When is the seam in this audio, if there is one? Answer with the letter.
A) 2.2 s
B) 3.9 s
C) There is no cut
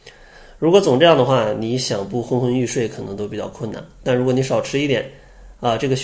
C